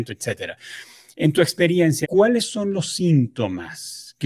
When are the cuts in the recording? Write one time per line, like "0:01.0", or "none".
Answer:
0:02.0